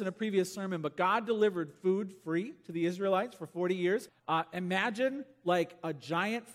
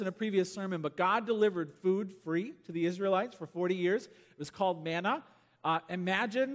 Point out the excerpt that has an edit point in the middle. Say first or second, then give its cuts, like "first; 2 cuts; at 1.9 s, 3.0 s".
first; 1 cut; at 4.1 s